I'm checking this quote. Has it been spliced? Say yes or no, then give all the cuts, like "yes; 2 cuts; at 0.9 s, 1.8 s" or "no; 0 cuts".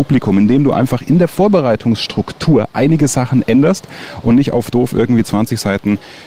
no; 0 cuts